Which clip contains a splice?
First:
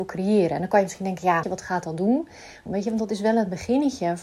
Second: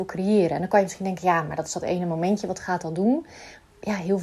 first; 2 cuts; at 1.4 s, 2.7 s

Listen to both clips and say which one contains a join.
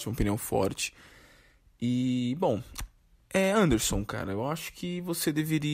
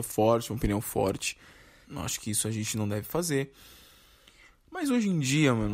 second; 1 cut; at 1.8 s

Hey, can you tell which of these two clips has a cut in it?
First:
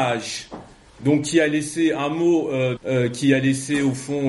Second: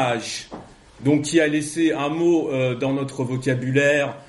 first; 1 cut; at 2.8 s

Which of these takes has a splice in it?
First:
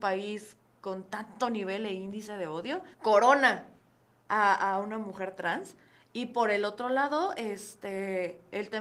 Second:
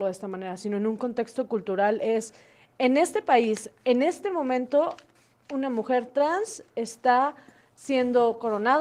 first; 1 cut; at 2.9 s

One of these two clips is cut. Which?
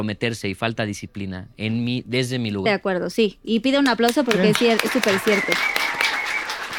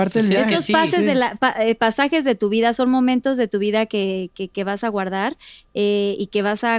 first; 1 cut; at 2.7 s

